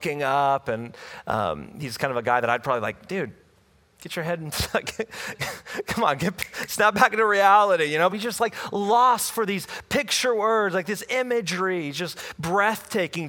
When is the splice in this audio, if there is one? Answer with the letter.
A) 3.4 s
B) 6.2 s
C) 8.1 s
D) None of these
C